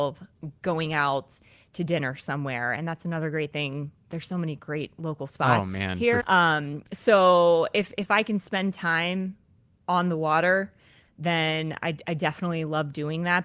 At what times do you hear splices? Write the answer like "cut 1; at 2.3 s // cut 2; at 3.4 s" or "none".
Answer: cut 1; at 6.2 s